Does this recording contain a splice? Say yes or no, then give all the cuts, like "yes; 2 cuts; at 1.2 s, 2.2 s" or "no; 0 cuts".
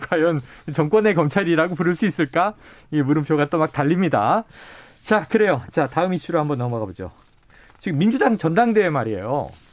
no; 0 cuts